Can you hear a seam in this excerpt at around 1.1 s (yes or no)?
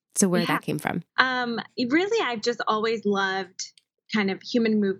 yes